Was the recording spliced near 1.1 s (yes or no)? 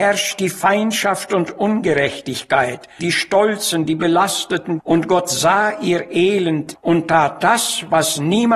no